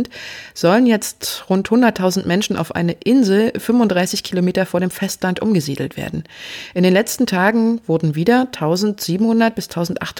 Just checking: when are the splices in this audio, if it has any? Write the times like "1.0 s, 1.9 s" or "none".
none